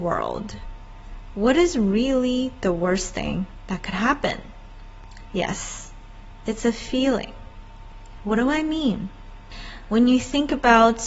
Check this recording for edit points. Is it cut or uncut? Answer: uncut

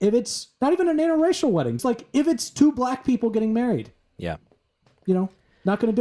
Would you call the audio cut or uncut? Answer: cut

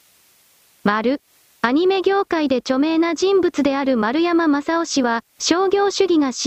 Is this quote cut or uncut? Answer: cut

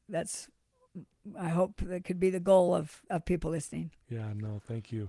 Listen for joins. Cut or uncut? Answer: uncut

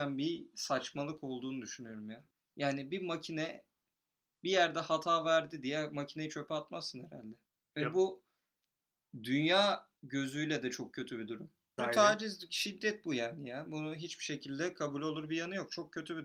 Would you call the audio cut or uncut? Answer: cut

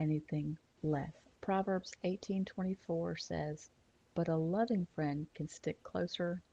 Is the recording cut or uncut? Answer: cut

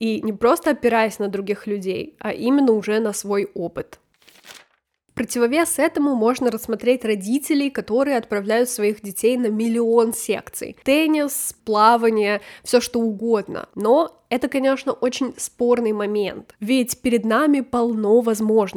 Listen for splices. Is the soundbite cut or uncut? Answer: cut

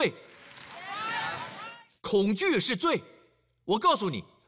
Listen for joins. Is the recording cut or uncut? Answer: uncut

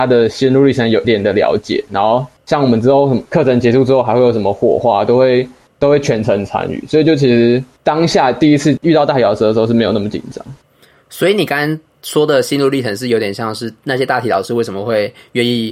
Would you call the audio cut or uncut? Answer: cut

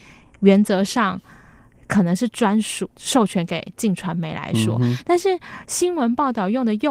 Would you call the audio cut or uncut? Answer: uncut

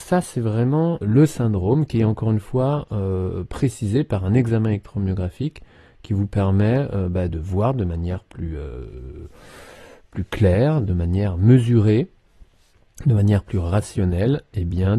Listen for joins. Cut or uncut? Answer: cut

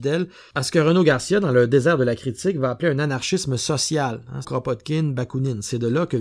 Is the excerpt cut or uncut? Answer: cut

